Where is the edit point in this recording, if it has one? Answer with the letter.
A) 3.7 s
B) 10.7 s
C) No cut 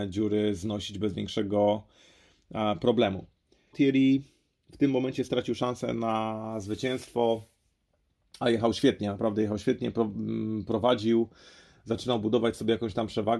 A